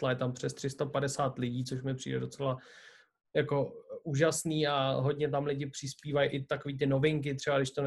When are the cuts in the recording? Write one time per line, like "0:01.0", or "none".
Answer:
none